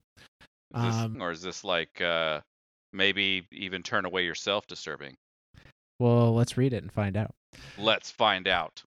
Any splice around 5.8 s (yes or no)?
no